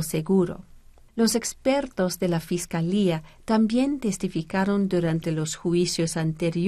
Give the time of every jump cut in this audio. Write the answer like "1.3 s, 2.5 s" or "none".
1.1 s